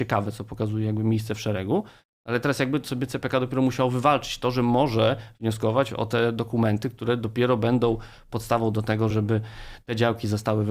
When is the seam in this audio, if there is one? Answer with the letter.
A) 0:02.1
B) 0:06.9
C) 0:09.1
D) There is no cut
C